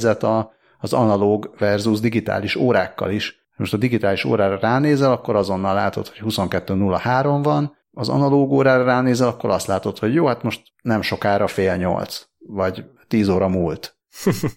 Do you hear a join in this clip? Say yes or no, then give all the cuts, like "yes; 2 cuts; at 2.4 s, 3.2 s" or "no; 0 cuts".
no; 0 cuts